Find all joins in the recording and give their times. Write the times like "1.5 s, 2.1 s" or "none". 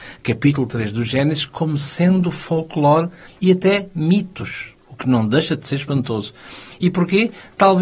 4.8 s